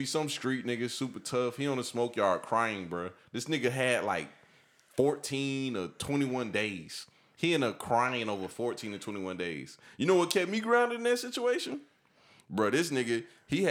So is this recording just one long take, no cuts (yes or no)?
yes